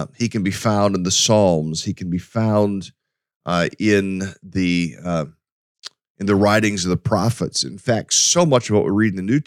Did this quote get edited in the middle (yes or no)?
no